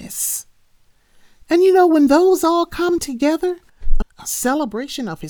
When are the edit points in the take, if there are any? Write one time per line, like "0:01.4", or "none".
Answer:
0:04.0